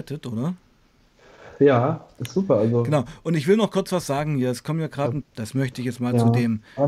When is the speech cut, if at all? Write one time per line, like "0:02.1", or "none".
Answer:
0:05.2

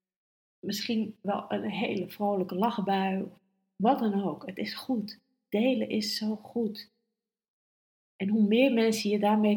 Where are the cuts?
none

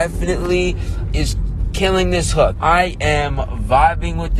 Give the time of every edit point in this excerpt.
0:01.1
0:02.5

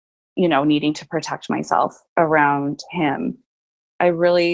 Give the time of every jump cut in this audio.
none

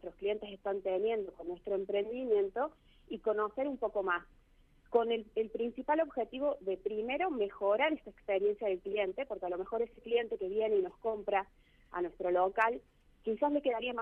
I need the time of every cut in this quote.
none

